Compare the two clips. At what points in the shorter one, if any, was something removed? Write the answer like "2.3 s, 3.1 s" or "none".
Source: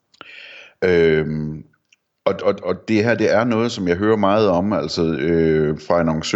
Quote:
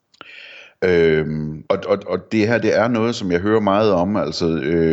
1.6 s